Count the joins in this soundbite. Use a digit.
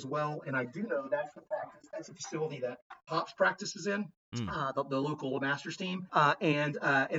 2